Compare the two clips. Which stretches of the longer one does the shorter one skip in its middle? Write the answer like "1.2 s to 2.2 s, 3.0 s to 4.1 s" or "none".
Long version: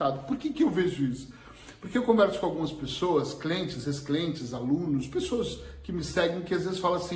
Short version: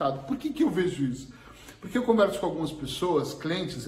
none